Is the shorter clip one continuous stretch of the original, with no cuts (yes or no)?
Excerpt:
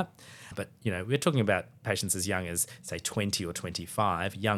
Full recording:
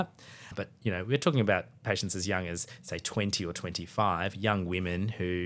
yes